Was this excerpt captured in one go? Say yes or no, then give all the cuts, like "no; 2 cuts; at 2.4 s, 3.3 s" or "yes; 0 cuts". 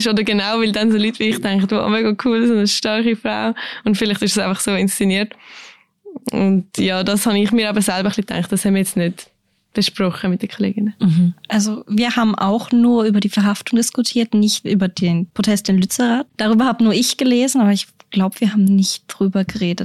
yes; 0 cuts